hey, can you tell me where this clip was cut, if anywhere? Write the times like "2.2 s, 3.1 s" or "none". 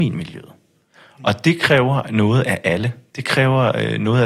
none